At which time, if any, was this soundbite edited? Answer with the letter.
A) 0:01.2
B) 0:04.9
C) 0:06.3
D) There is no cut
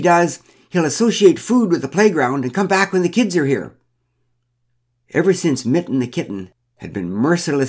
D